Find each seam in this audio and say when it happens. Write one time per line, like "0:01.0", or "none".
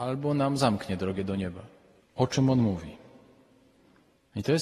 0:02.0

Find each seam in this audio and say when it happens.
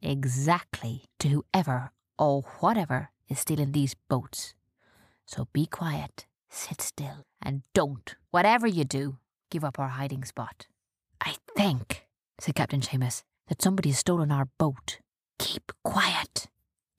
0:11.1

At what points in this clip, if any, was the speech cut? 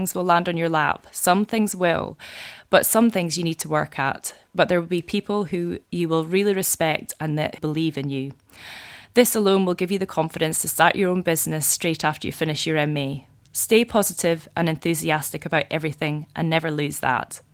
0:05.8

